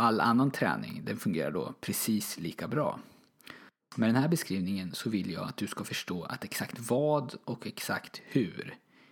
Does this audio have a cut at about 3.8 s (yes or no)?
yes